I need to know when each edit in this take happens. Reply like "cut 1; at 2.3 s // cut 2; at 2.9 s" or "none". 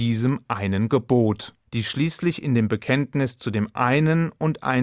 cut 1; at 1.7 s